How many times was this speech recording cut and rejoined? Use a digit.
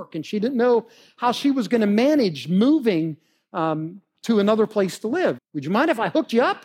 1